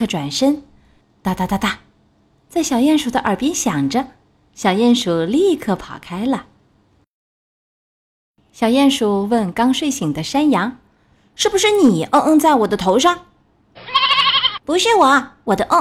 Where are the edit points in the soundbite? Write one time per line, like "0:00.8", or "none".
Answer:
0:01.0

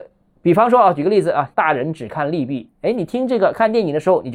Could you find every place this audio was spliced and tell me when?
0:01.5

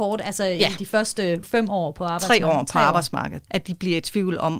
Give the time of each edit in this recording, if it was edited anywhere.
0:01.4
0:03.5

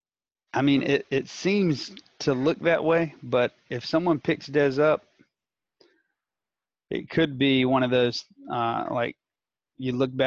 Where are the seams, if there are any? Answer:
none

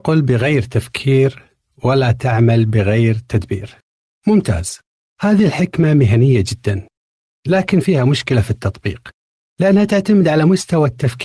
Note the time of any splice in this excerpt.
none

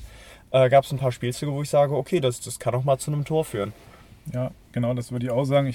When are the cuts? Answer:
none

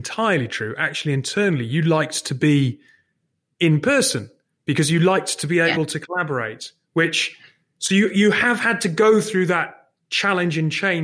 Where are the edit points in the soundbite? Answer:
none

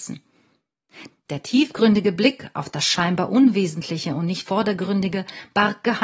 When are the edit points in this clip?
0:01.1

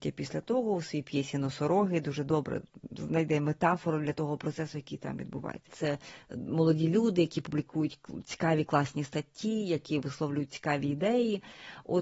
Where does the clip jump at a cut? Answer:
0:05.7

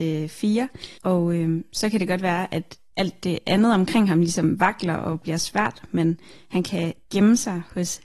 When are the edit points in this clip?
0:01.0

